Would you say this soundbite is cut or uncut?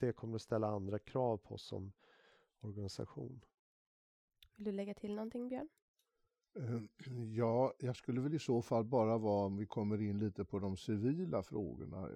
uncut